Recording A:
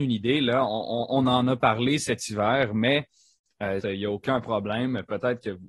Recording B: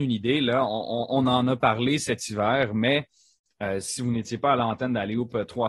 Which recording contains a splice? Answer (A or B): A